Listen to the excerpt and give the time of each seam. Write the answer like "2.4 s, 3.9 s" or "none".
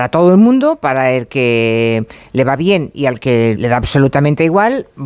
3.6 s